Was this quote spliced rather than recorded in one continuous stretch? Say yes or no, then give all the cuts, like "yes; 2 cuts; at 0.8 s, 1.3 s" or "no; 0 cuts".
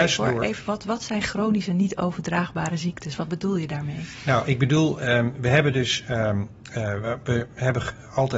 no; 0 cuts